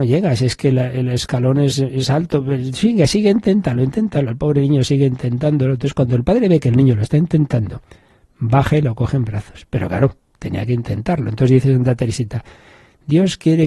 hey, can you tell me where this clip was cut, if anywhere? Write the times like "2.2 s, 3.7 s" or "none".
none